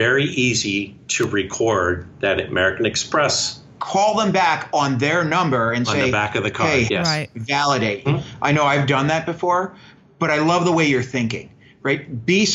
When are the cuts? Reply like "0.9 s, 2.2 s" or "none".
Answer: 3.8 s, 6.9 s, 8.0 s